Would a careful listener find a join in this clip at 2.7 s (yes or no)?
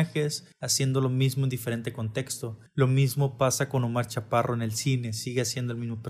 no